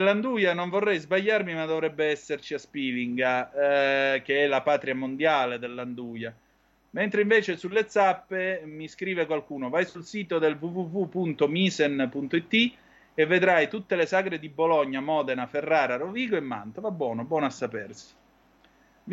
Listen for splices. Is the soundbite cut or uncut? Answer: uncut